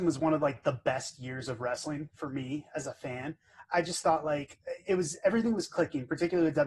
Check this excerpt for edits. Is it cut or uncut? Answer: uncut